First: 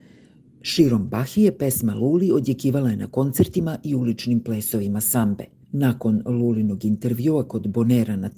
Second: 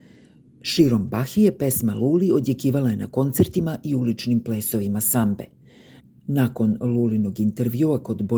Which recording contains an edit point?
first; 1 cut; at 5.6 s

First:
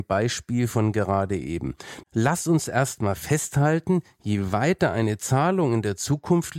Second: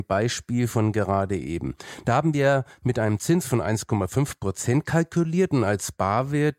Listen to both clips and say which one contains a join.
first; 1 cut; at 2.0 s

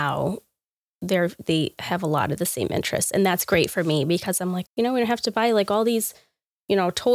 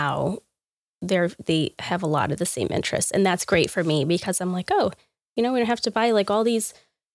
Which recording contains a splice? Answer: first; 1 cut; at 4.7 s

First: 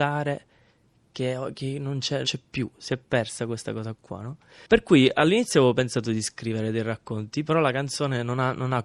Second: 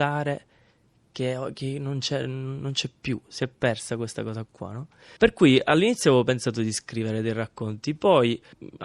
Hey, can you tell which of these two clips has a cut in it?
first; 2 cuts; at 2.2 s, 7.5 s

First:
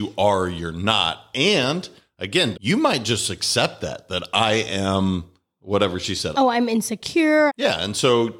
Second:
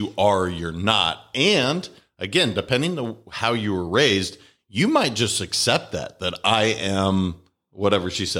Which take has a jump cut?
first; 3 cuts; at 2.5 s, 6.3 s, 7.5 s

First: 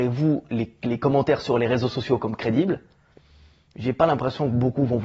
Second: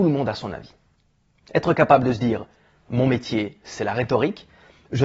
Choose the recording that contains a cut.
second; 1 cut; at 1.4 s

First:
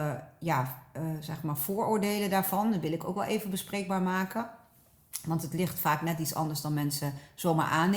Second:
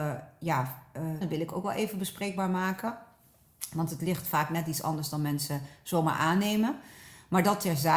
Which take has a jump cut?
second; 1 cut; at 1.2 s

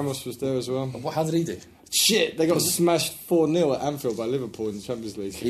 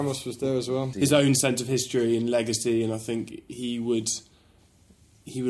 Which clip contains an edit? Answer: second; 1 cut; at 0.9 s

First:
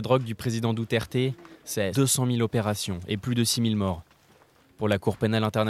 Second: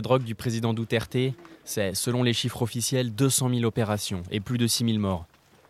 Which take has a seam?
first; 1 cut; at 1.9 s

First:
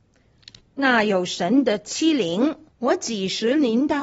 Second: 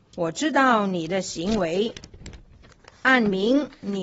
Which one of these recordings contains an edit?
first; 1 cut; at 2.7 s

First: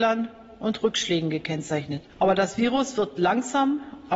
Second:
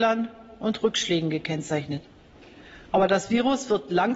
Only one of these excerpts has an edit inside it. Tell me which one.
first; 1 cut; at 2.1 s

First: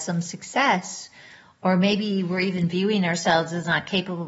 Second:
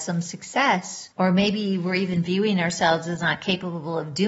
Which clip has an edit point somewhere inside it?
second; 1 cut; at 1.1 s

